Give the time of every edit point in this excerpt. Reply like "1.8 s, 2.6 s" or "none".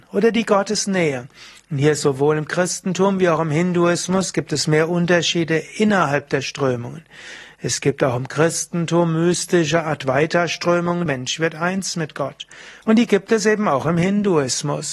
11.1 s, 12.8 s